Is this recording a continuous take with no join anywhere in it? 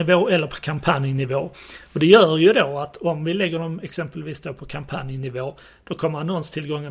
yes; 0 cuts

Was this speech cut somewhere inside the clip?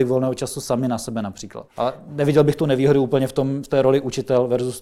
yes; 1 cut; at 1.7 s

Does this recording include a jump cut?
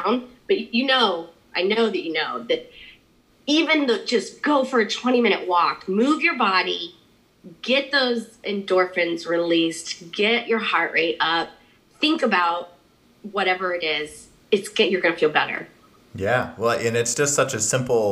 no; 0 cuts

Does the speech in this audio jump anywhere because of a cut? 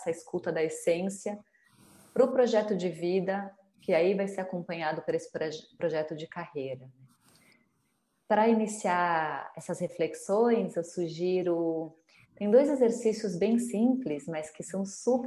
no; 0 cuts

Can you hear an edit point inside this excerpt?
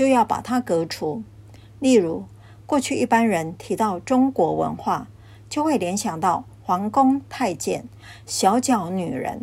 no; 0 cuts

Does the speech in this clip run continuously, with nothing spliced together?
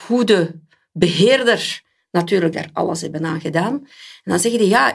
yes; 0 cuts

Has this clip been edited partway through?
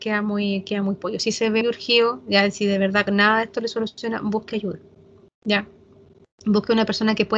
yes; 1 cut; at 1.6 s

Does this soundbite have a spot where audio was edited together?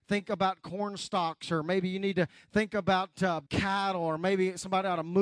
yes; 1 cut; at 3.5 s

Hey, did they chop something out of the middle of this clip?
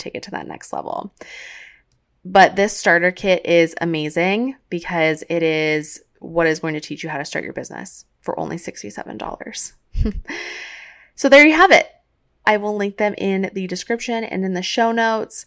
yes; 1 cut; at 12.4 s

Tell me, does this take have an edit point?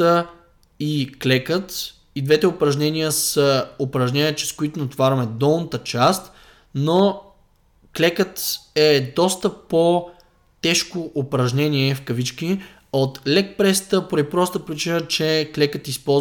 no; 0 cuts

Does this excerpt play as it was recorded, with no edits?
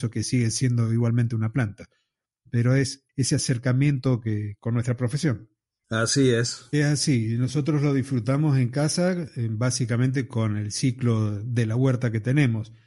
no; 2 cuts; at 4.6 s, 6.7 s

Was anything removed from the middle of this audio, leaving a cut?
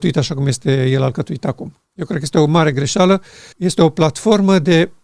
yes; 2 cuts; at 1.9 s, 3.5 s

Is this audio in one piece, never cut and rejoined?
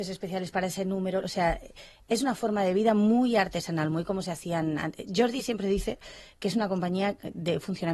no; 1 cut; at 1.2 s

